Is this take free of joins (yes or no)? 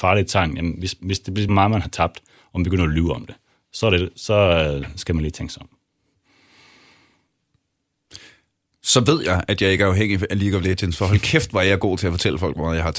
no